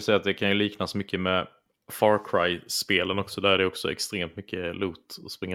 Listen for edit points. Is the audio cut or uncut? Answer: uncut